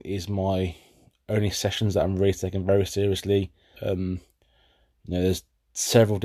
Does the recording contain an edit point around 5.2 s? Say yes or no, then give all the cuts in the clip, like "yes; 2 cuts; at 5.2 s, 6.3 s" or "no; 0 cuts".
no; 1 cut; at 3.7 s